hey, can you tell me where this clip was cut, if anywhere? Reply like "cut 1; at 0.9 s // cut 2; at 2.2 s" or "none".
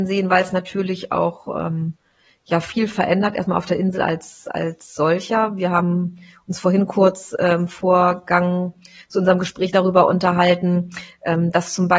none